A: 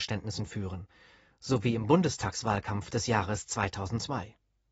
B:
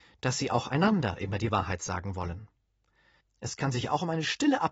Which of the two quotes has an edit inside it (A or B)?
B